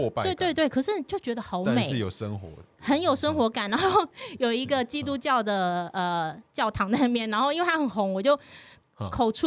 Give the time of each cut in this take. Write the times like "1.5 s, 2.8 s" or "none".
none